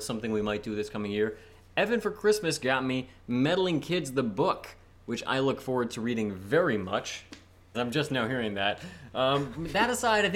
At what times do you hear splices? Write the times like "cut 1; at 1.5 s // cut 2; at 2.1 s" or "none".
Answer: cut 1; at 7.7 s